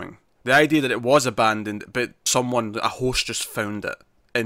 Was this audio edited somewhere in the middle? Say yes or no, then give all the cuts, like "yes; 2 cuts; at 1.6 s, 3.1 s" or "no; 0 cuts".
yes; 1 cut; at 2.3 s